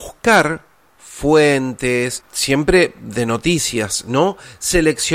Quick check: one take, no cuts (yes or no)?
no